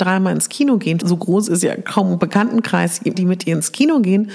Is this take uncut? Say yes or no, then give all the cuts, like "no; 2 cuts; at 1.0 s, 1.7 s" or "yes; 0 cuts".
no; 2 cuts; at 1.0 s, 3.1 s